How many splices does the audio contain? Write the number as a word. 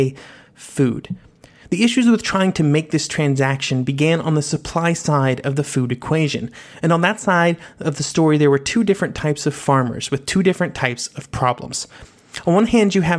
zero